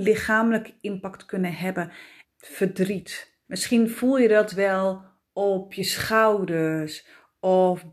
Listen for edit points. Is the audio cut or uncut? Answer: cut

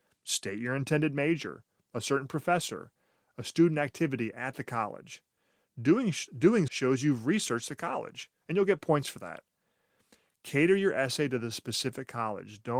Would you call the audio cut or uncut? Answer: cut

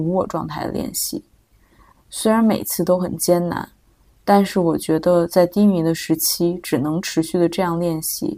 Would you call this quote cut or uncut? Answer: cut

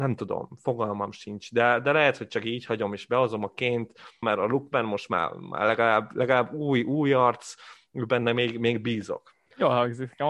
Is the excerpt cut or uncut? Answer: cut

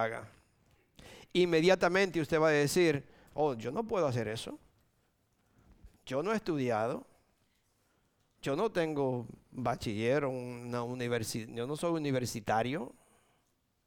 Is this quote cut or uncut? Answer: cut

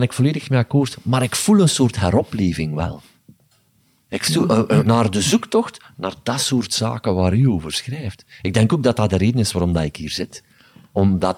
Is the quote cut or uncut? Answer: cut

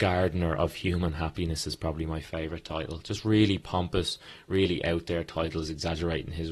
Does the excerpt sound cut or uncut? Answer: uncut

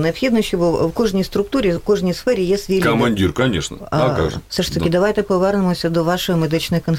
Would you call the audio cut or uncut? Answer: uncut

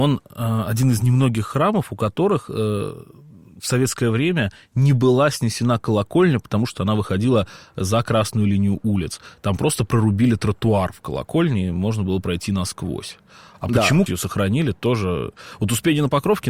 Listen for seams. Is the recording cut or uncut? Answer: cut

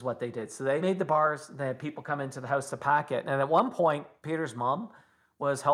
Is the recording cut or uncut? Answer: uncut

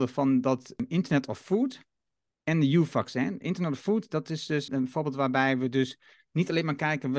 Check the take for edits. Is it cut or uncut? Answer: cut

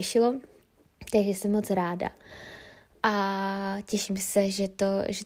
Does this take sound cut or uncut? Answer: uncut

